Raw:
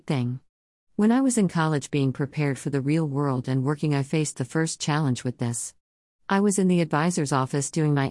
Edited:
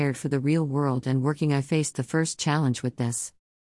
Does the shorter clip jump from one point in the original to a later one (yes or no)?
no